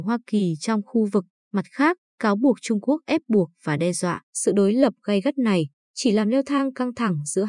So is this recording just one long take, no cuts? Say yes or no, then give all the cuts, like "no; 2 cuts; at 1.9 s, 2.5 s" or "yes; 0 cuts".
no; 1 cut; at 4.2 s